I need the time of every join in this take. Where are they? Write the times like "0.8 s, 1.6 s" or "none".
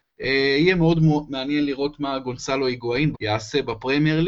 3.1 s